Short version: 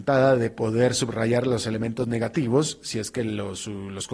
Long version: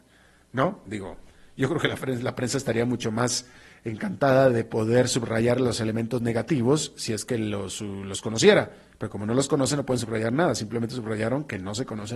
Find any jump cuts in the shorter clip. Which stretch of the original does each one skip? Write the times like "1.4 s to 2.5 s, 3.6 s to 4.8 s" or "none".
none